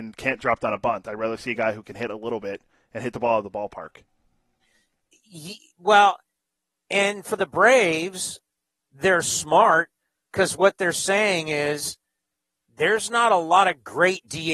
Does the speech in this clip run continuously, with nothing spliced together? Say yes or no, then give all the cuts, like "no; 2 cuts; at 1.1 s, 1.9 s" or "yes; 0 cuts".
yes; 0 cuts